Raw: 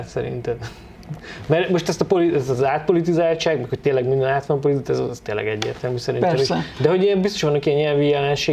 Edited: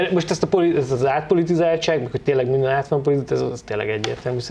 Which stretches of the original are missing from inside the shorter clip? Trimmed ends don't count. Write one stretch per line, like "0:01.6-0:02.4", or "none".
none